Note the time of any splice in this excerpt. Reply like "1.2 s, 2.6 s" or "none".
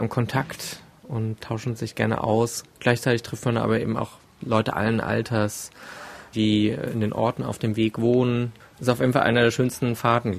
6.3 s, 8.8 s